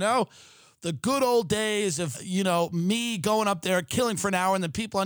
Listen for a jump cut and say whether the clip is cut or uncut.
cut